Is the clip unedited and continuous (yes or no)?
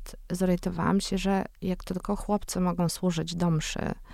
yes